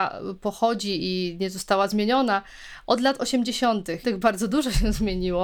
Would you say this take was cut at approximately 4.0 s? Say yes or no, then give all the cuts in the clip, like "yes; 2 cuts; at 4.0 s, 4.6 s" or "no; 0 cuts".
yes; 1 cut; at 4.0 s